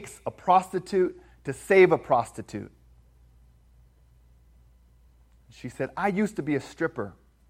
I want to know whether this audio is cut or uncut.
uncut